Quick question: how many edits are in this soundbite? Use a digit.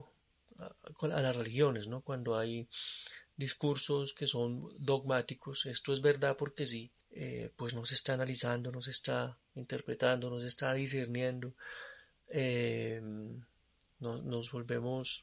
1